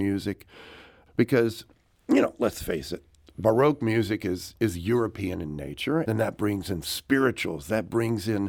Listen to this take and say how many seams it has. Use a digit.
2